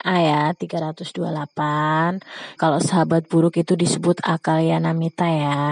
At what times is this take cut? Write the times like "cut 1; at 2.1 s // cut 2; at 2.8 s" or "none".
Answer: cut 1; at 2.6 s